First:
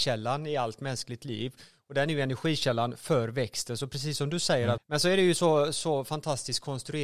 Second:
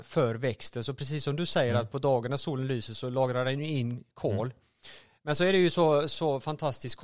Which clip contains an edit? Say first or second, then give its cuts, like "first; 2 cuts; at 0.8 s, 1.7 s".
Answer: first; 1 cut; at 4.8 s